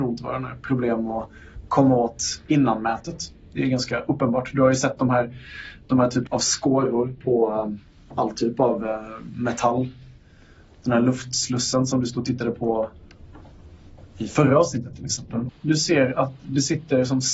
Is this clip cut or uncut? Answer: cut